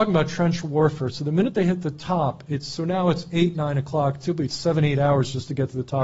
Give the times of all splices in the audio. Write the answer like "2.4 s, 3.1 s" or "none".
none